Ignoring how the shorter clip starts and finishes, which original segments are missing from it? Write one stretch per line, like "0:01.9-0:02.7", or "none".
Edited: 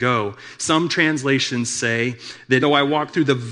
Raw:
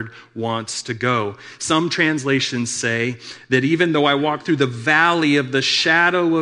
0:03.6-0:03.9